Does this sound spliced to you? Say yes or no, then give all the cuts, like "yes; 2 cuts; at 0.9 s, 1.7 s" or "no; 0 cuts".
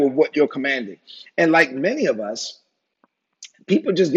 no; 0 cuts